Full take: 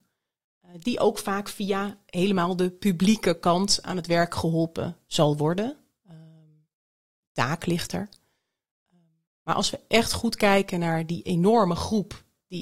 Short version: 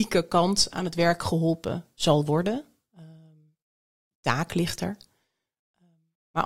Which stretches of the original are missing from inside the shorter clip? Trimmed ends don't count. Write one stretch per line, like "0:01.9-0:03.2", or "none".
none